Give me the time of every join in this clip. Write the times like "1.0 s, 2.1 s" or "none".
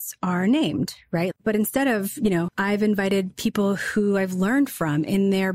1.3 s, 2.5 s